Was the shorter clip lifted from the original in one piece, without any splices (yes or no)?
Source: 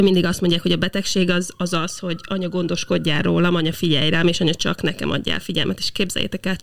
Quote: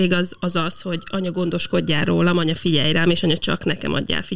yes